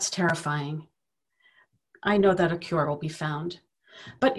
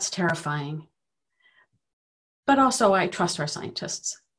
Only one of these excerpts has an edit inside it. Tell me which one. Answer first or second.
first